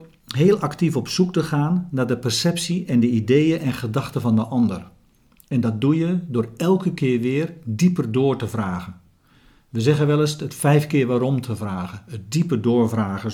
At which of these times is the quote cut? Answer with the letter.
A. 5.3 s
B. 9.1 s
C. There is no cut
C